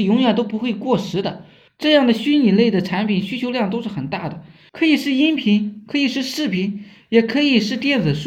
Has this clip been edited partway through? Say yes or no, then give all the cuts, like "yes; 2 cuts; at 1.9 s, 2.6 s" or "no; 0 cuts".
yes; 2 cuts; at 1.7 s, 4.7 s